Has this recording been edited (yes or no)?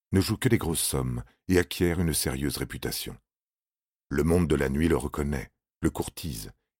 no